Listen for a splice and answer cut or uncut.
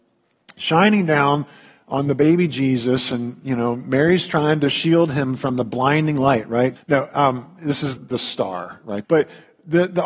cut